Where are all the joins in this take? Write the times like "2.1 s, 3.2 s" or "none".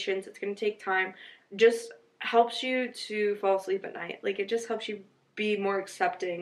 1.4 s

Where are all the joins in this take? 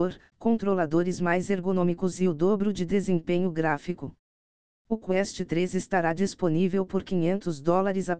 none

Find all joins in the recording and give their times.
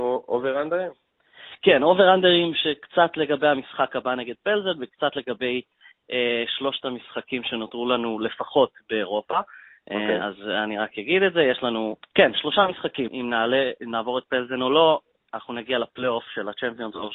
12.0 s, 13.1 s

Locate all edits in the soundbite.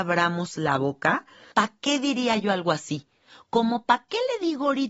1.5 s

